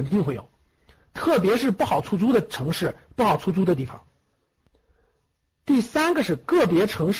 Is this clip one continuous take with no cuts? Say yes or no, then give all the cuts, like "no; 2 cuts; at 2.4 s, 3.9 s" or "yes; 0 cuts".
yes; 0 cuts